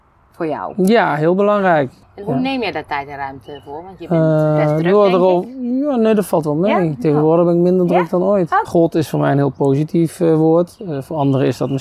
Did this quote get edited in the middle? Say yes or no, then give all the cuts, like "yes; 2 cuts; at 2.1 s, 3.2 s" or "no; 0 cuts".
yes; 2 cuts; at 2.0 s, 8.6 s